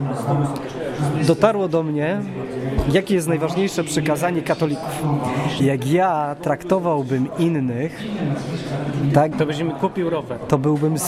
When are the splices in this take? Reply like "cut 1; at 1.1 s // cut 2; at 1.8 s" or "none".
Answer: cut 1; at 5.6 s // cut 2; at 9.3 s

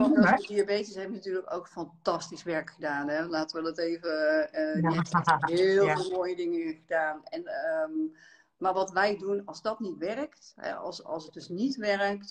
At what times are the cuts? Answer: none

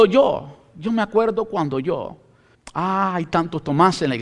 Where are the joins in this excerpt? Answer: cut 1; at 2.5 s

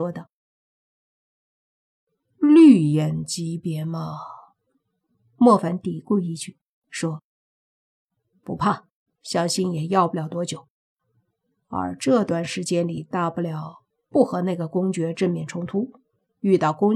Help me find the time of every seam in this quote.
cut 1; at 9.1 s

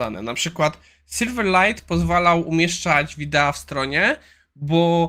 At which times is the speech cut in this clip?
none

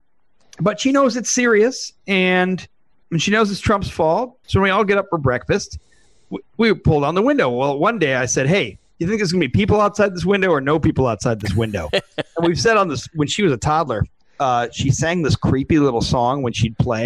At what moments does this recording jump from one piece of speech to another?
cut 1; at 3.0 s // cut 2; at 4.4 s

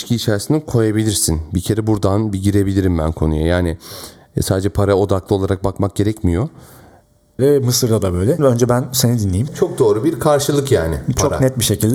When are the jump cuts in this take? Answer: cut 1; at 7.4 s // cut 2; at 8.4 s // cut 3; at 9.5 s

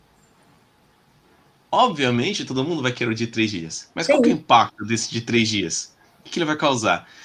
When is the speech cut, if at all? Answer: none

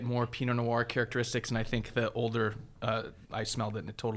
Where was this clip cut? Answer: cut 1; at 3.2 s

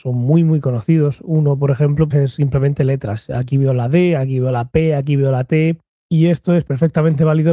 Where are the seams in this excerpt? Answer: cut 1; at 2.1 s

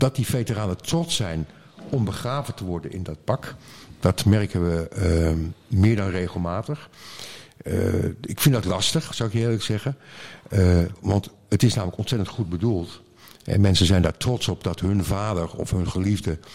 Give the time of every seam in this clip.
none

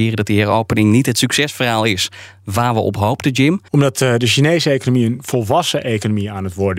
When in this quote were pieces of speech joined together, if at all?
cut 1; at 3.7 s

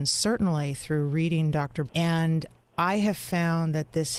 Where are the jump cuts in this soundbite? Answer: cut 1; at 1.9 s

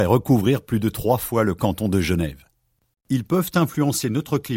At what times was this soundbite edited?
cut 1; at 2.9 s

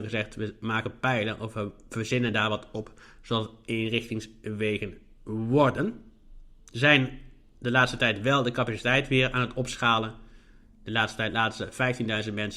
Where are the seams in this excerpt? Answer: none

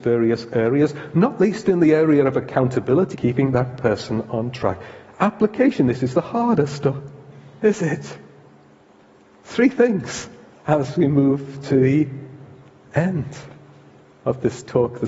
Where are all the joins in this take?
cut 1; at 3.1 s

